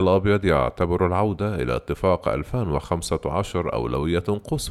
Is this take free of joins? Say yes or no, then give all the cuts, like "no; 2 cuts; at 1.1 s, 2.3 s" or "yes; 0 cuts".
yes; 0 cuts